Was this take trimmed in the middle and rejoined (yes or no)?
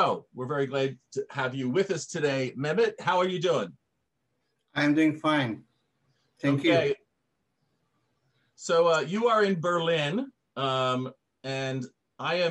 no